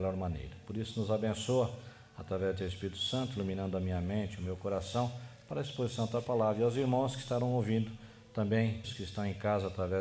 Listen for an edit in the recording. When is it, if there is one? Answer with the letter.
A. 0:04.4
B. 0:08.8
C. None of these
B